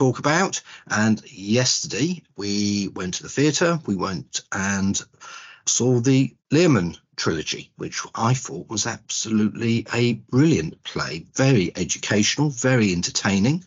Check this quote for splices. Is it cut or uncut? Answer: uncut